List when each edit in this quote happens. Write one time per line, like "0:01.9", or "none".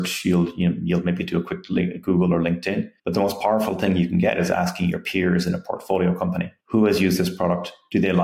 0:03.0
0:06.6